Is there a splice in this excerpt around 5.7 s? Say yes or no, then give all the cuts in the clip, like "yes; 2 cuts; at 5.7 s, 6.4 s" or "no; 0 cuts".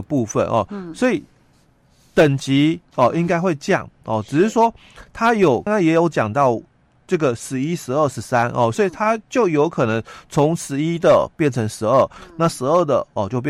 yes; 1 cut; at 5.7 s